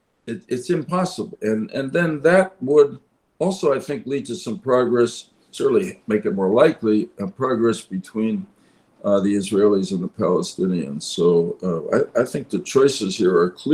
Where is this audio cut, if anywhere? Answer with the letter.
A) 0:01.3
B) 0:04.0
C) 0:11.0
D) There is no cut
A